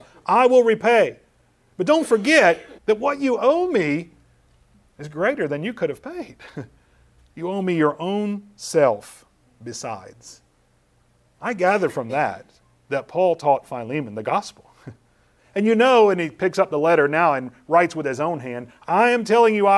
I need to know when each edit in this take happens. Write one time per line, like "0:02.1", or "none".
0:02.8
0:15.4